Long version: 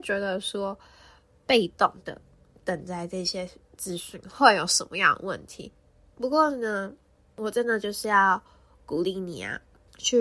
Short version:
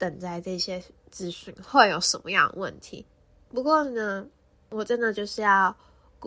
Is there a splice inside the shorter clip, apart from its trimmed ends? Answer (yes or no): no